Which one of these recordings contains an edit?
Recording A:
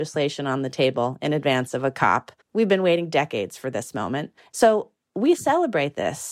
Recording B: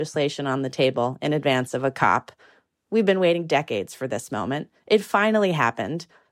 A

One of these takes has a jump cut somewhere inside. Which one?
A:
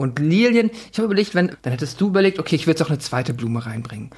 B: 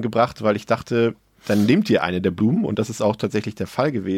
A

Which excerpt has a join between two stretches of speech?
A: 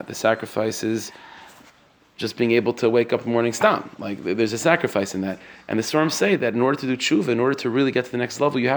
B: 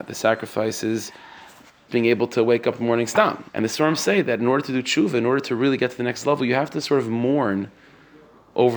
B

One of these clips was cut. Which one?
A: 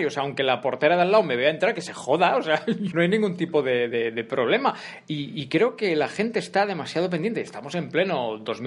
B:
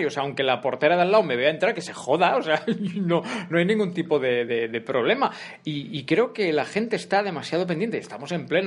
A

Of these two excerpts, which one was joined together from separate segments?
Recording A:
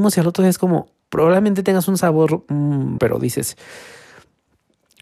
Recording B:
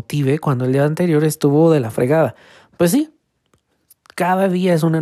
A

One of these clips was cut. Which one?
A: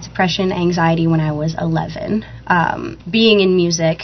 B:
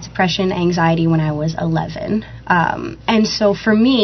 A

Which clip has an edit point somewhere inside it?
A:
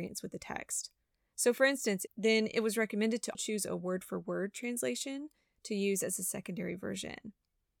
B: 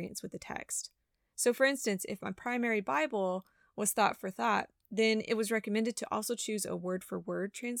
A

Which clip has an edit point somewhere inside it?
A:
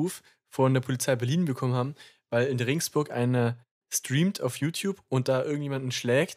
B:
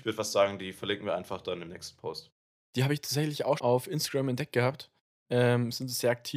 B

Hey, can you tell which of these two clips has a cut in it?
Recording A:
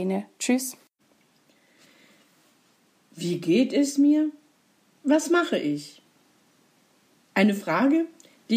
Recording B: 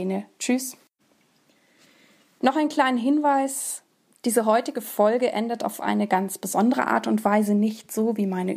B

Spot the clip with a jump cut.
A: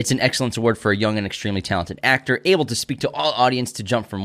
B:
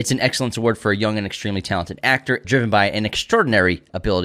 B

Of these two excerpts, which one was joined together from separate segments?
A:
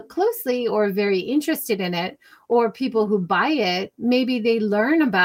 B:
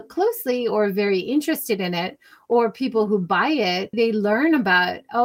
B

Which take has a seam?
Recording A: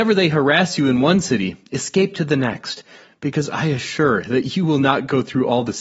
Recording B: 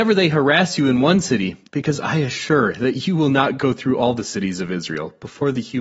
B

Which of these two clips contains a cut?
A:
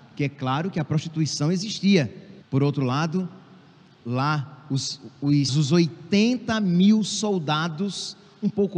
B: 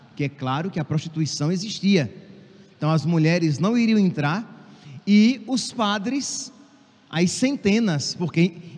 A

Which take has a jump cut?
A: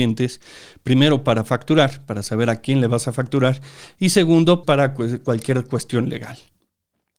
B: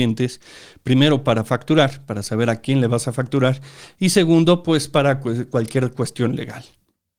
A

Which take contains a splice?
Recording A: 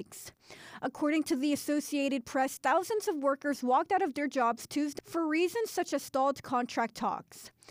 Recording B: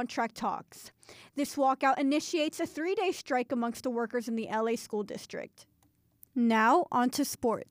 A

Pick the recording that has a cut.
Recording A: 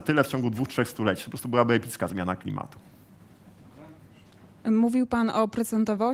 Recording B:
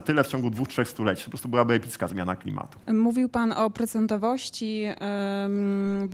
B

